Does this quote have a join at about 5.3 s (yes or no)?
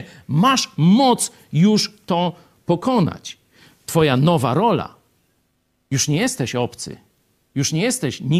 no